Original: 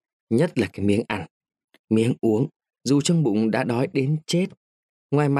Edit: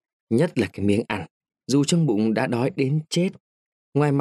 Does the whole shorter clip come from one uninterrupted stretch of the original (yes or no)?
no